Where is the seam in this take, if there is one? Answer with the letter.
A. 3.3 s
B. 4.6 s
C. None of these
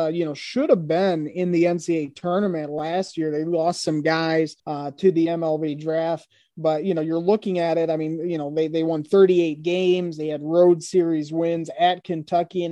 B